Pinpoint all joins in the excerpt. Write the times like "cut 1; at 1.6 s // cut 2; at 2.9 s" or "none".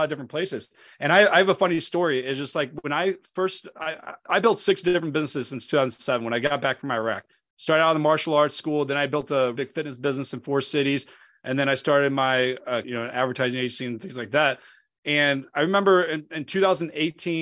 cut 1; at 9.6 s // cut 2; at 12.8 s